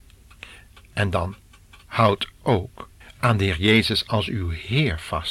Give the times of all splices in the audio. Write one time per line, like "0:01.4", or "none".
0:03.0